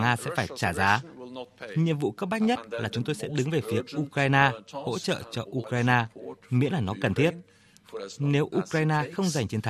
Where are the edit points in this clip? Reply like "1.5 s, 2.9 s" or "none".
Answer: none

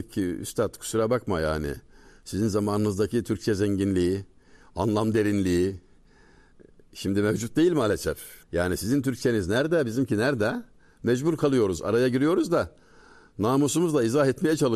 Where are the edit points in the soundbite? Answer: 8.4 s

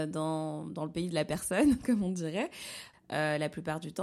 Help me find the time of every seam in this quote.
2.9 s

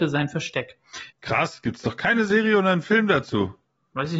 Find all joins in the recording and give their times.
1.1 s

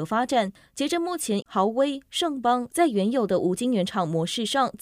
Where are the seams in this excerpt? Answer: 1.4 s, 2.7 s

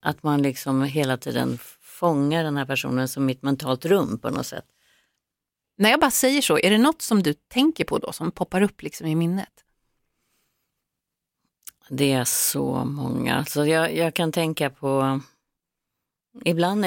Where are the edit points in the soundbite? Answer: 5.6 s

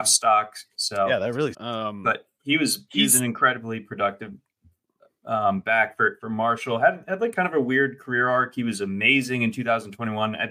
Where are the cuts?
1.5 s

